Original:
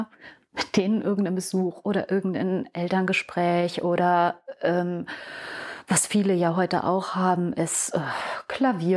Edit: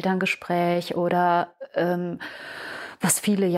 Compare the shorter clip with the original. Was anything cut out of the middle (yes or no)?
no